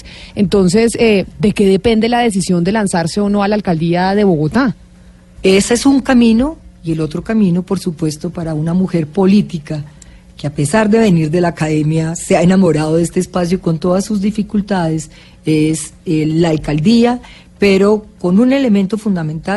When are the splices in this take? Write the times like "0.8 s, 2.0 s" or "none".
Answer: 5.4 s